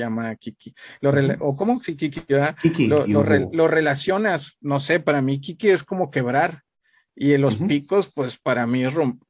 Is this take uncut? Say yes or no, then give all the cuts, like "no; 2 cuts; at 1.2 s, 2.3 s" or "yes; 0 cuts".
yes; 0 cuts